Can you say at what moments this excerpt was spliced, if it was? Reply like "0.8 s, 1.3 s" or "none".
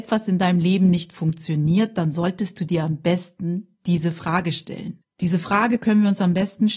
5.0 s